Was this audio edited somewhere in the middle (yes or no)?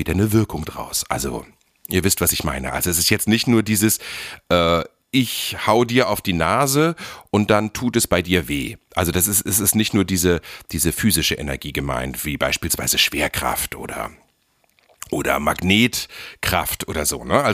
no